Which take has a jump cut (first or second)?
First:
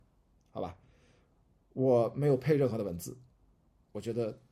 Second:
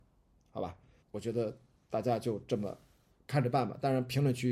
second